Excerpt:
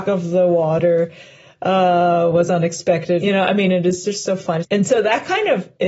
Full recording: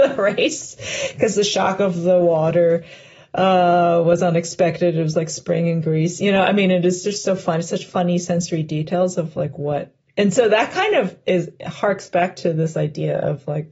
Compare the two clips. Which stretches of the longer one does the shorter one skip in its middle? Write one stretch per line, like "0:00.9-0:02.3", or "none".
0:04.9-0:06.2
0:07.6-0:10.1